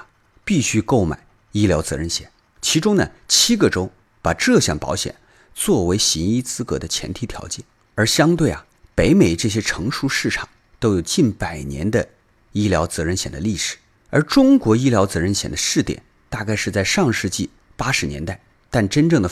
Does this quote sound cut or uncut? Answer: uncut